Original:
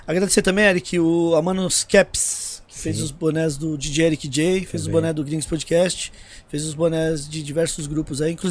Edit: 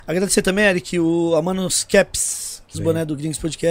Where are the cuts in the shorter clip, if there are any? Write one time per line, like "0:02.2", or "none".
0:02.7